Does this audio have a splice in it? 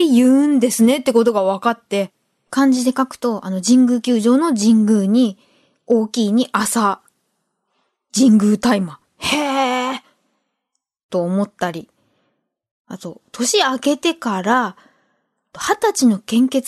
no; 0 cuts

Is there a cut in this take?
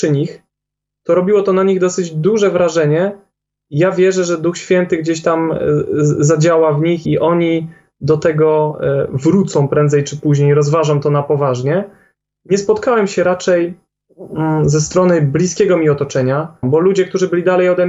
yes; 2 cuts; at 7.0 s, 16.6 s

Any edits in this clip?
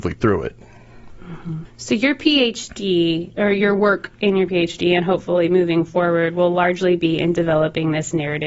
yes; 1 cut; at 1.6 s

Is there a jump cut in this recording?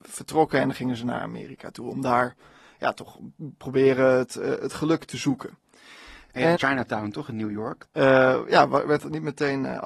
yes; 2 cuts; at 6.5 s, 7.8 s

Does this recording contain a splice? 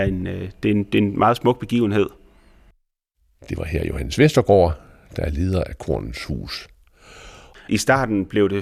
yes; 1 cut; at 7.5 s

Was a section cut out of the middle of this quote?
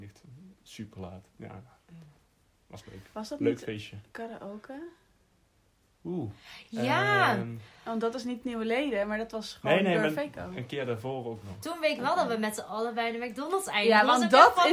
no; 0 cuts

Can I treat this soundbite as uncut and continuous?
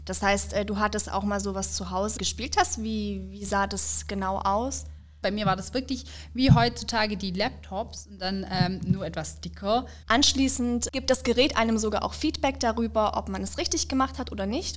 no; 3 cuts; at 2.2 s, 5.2 s, 10.0 s

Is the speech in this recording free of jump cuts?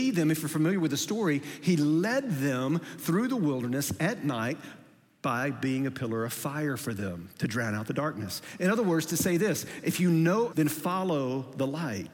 no; 1 cut; at 10.5 s

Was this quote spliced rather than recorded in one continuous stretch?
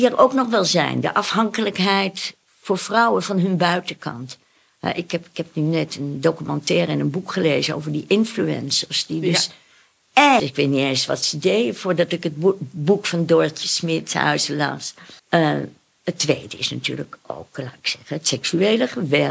yes; 2 cuts; at 10.4 s, 15.2 s

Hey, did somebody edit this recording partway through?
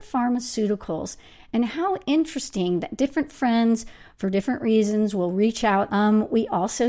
yes; 1 cut; at 5.9 s

